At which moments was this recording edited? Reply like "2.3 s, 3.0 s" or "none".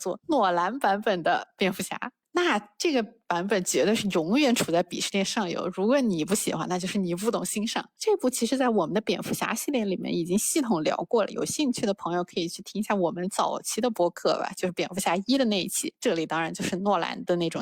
15.9 s